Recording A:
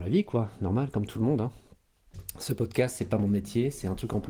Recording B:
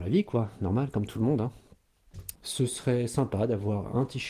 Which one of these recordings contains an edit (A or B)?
B